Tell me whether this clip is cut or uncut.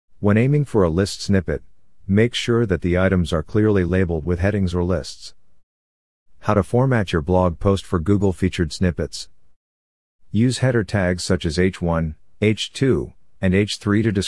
uncut